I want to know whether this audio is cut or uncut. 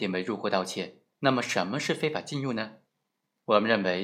cut